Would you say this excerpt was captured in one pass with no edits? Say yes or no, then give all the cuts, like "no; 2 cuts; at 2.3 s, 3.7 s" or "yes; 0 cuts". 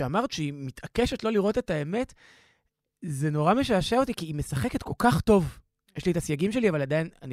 yes; 0 cuts